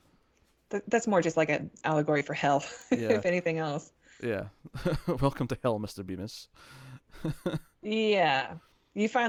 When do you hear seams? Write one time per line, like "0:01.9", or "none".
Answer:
none